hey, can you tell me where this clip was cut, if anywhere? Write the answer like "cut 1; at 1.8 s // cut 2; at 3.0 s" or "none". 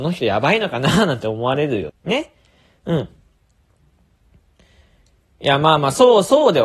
cut 1; at 1.9 s

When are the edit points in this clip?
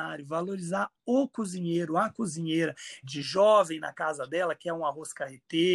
cut 1; at 3.0 s

